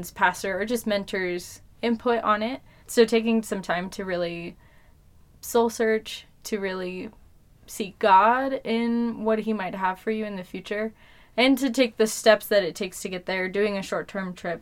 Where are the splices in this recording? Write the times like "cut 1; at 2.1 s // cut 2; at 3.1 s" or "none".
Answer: cut 1; at 2.8 s